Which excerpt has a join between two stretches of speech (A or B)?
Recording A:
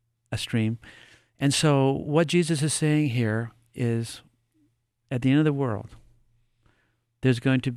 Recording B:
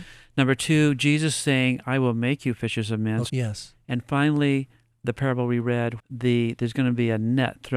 B